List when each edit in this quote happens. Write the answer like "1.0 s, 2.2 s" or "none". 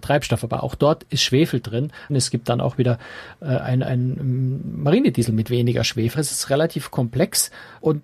2.1 s, 6.1 s